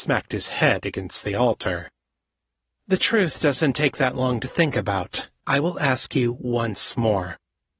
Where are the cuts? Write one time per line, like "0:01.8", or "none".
0:05.4